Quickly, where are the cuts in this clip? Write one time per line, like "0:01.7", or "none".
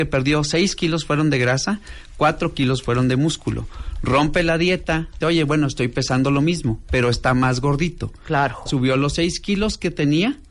0:05.2
0:08.7